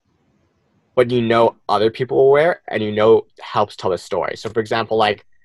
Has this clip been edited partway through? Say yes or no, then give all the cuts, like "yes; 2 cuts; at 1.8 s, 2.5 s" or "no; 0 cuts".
no; 0 cuts